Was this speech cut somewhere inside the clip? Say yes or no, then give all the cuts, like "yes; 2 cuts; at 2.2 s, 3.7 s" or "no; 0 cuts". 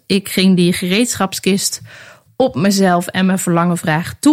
no; 0 cuts